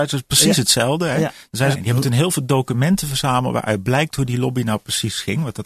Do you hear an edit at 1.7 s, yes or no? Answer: yes